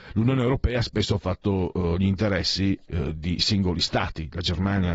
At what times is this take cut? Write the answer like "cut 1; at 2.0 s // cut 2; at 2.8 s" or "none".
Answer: none